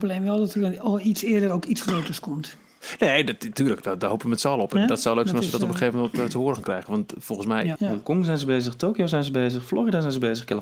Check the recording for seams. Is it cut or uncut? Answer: cut